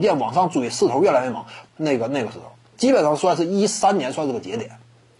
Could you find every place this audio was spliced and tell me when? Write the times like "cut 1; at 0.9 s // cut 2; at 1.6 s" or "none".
cut 1; at 1.7 s